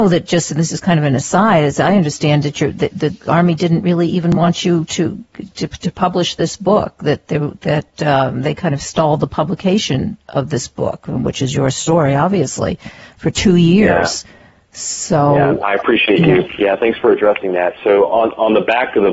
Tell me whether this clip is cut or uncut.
uncut